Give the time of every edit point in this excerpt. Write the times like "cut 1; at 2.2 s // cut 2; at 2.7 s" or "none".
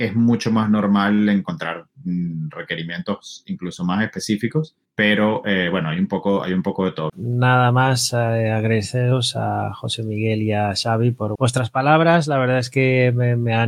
cut 1; at 7.1 s // cut 2; at 11.4 s